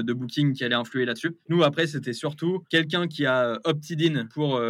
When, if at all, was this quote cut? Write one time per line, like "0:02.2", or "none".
0:01.5